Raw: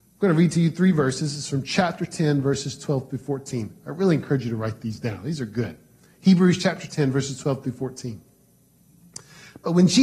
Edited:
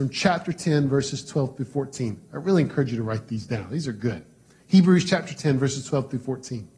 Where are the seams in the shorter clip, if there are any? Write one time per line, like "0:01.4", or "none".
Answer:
none